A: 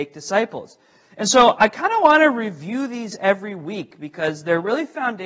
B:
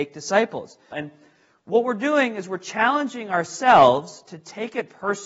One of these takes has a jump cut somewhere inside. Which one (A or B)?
B